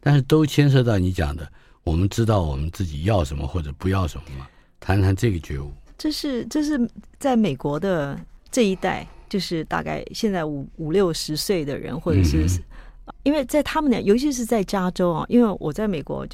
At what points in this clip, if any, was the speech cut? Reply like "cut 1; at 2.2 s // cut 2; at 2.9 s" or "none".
cut 1; at 13.1 s